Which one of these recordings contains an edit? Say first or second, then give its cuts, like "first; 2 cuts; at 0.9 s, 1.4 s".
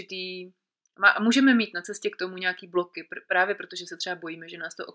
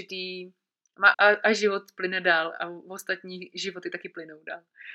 second; 1 cut; at 1.1 s